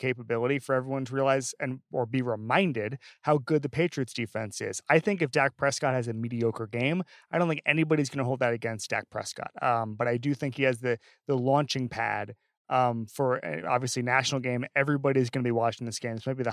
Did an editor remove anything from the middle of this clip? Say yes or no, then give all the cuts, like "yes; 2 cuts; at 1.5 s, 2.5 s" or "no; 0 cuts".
no; 0 cuts